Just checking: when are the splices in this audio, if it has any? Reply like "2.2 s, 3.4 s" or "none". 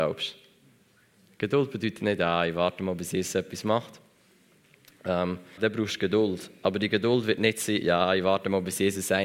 5.6 s